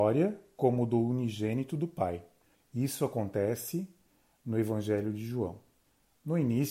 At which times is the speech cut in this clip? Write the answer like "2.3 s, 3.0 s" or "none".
2.5 s